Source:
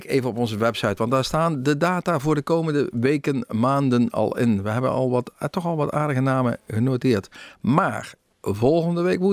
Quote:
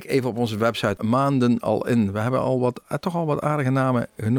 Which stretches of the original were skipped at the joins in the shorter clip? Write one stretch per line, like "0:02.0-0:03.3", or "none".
0:01.0-0:03.5